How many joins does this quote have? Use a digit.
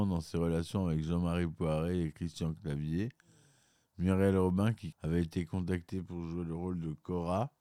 1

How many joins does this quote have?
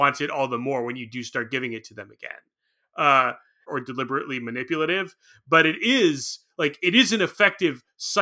1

